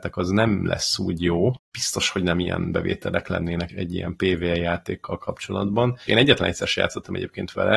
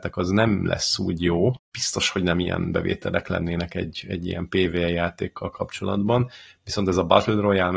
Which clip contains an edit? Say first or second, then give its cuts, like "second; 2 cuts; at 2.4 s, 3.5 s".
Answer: first; 2 cuts; at 3.7 s, 6.1 s